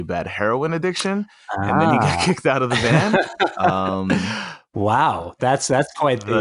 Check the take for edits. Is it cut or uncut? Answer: uncut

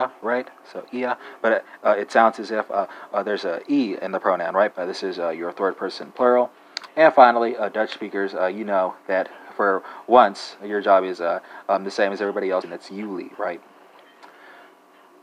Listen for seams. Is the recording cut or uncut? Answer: cut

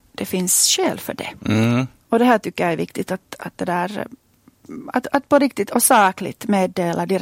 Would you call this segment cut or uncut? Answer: cut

